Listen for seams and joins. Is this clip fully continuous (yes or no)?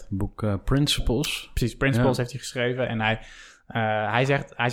yes